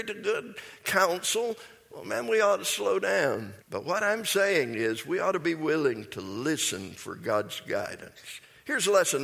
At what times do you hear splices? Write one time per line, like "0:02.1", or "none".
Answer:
0:03.6